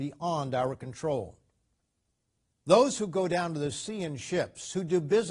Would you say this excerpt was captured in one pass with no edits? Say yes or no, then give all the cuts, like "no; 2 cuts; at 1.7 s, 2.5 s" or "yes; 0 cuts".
yes; 0 cuts